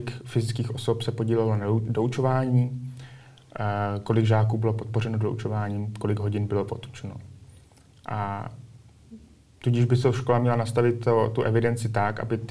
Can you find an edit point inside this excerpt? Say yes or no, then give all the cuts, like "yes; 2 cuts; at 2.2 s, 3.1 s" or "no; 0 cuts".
no; 0 cuts